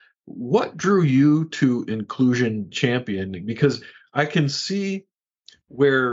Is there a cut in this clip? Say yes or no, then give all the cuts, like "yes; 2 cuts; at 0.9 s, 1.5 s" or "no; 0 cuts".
no; 0 cuts